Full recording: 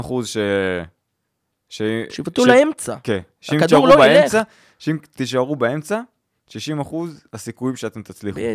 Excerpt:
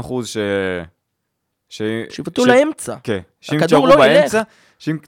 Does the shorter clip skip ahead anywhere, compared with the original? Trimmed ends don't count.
no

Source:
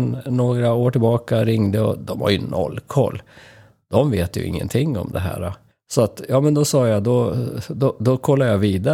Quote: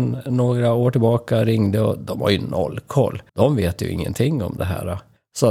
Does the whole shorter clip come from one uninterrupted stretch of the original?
no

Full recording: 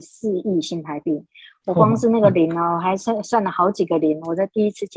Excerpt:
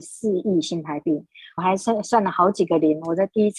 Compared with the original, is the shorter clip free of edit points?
no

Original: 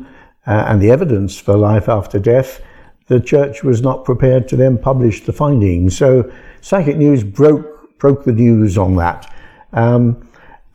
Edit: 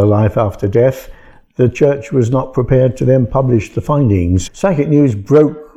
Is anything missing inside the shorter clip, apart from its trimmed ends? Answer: yes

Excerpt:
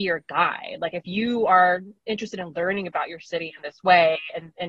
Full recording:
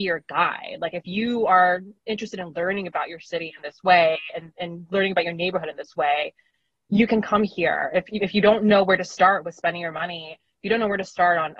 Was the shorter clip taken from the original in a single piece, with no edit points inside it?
yes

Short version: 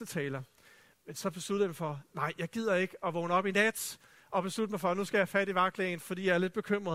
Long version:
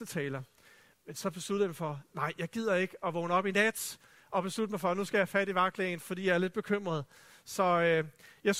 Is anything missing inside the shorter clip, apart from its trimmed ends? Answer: no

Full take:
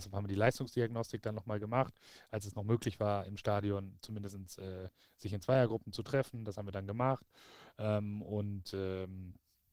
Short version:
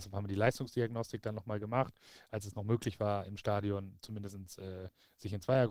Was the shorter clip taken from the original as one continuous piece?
yes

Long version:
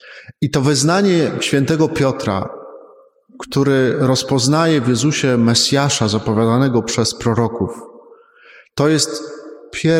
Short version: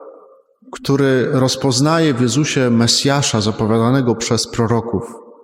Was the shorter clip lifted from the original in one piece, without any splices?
yes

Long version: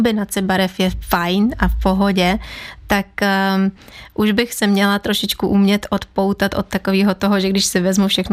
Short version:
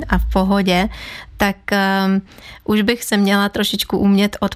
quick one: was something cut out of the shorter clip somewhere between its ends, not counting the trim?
no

